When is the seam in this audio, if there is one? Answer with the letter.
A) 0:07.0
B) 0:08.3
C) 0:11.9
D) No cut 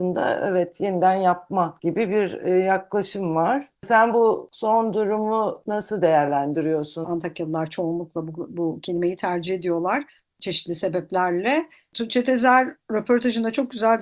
A